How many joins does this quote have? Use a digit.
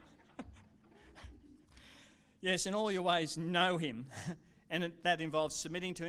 0